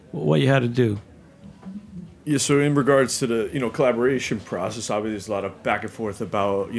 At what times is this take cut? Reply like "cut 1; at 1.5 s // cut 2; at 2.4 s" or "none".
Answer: none